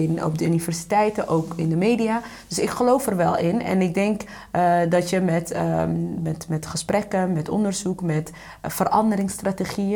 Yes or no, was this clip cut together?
no